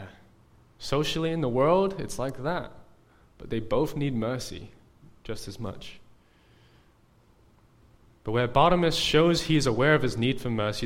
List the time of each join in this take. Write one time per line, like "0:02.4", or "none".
none